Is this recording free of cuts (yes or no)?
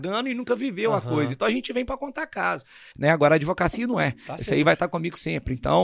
no